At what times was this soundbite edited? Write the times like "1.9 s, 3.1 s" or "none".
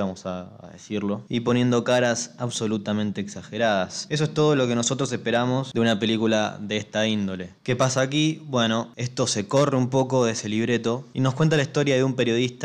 none